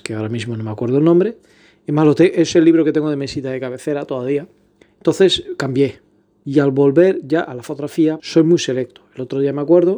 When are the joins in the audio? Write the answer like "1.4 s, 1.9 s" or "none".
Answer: 4.8 s, 8.2 s